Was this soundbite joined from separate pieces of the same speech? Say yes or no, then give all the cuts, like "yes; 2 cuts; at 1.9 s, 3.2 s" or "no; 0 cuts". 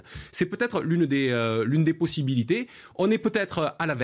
no; 0 cuts